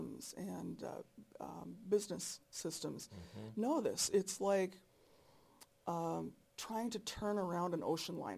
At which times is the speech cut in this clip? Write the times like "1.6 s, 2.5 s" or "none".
none